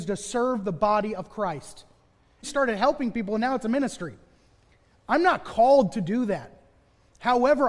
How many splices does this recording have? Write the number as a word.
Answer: one